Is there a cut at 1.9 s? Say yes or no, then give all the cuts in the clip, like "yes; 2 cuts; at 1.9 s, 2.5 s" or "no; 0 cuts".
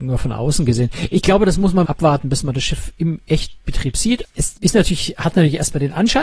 yes; 2 cuts; at 1.9 s, 4.2 s